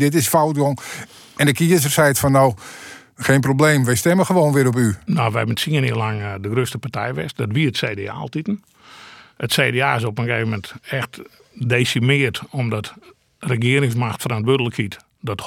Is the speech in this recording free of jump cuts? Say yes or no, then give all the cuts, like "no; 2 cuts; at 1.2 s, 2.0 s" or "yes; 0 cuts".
yes; 0 cuts